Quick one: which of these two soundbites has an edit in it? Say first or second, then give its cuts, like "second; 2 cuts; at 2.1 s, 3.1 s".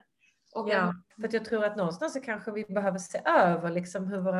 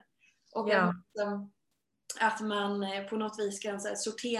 first; 1 cut; at 1.1 s